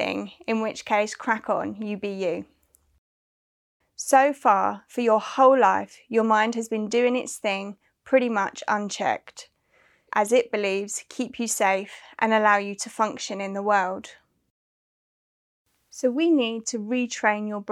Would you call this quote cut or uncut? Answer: cut